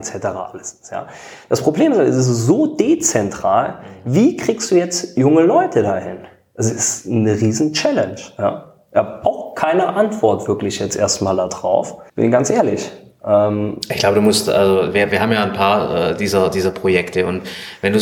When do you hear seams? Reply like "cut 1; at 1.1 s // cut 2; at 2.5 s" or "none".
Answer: cut 1; at 12.1 s